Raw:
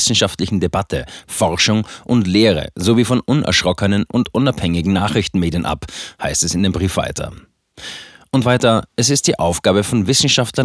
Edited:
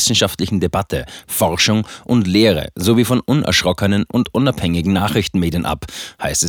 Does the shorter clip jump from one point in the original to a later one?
no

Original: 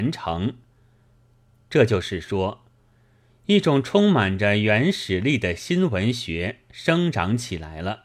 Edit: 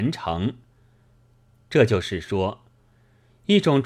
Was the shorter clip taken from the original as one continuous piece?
yes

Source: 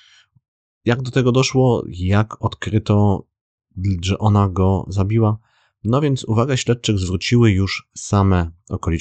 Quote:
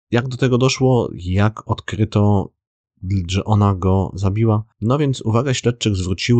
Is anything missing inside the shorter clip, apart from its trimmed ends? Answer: yes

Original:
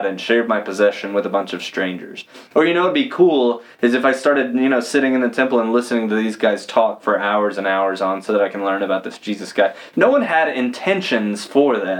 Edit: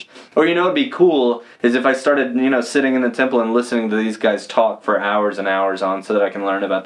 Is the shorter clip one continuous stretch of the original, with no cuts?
yes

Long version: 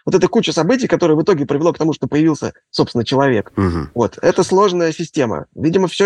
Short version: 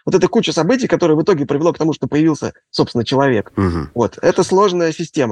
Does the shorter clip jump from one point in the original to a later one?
no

